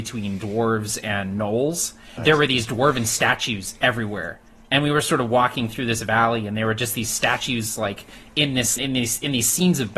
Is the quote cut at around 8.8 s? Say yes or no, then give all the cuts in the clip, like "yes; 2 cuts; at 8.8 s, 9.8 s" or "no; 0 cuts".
yes; 2 cuts; at 2.2 s, 8.8 s